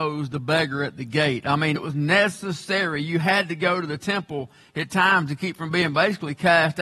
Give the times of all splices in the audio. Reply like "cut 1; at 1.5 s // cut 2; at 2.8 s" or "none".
cut 1; at 1.8 s